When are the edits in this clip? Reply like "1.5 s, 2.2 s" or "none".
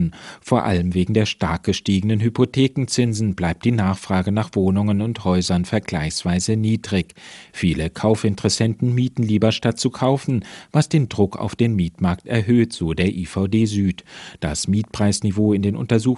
none

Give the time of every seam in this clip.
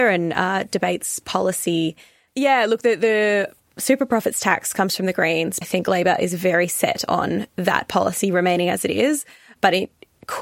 2.3 s, 5.6 s

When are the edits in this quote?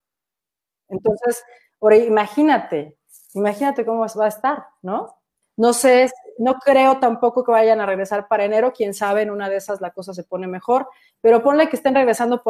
5.4 s

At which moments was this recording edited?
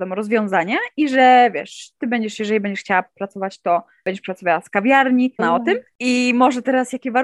5.4 s

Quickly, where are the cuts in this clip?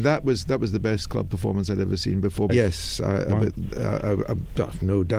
2.5 s

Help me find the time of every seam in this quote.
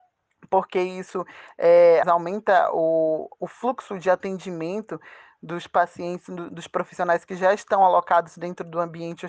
2.0 s

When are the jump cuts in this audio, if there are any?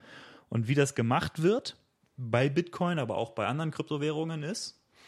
2.0 s

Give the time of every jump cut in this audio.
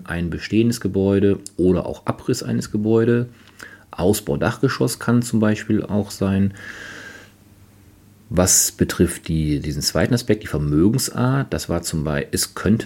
none

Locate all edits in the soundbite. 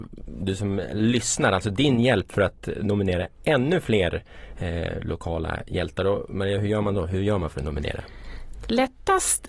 none

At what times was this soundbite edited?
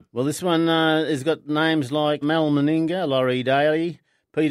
2.2 s

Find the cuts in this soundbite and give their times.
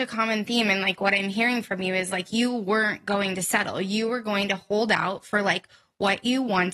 none

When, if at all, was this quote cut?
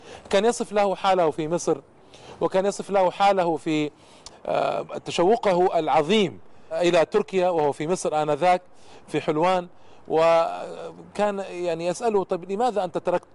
4.3 s

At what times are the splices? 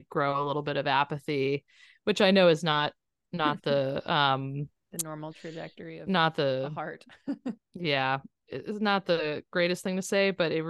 none

